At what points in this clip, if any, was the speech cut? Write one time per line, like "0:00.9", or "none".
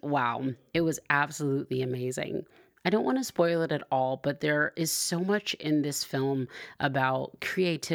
none